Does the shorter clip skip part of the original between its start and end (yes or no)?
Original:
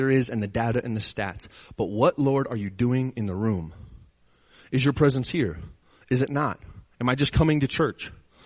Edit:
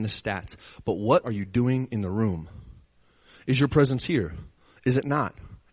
yes